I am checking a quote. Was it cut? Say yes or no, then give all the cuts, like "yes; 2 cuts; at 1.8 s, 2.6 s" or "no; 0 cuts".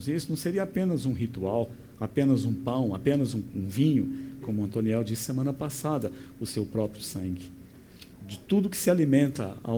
yes; 2 cuts; at 4.4 s, 8.2 s